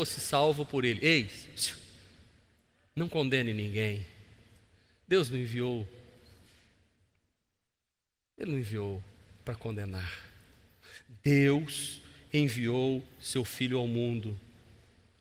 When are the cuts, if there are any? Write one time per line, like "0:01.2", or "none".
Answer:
none